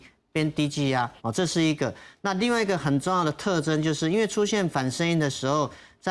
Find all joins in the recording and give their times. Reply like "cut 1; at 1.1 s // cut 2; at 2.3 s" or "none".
cut 1; at 1.2 s

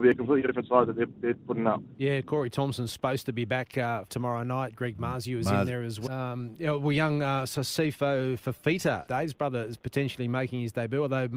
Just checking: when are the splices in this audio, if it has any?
cut 1; at 4.1 s // cut 2; at 6.1 s // cut 3; at 9.1 s

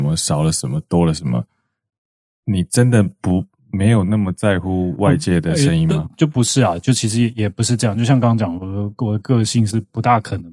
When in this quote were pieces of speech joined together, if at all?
none

